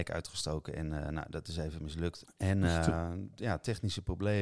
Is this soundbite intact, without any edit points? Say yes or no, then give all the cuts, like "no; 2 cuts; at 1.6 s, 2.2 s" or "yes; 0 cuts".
no; 1 cut; at 2.2 s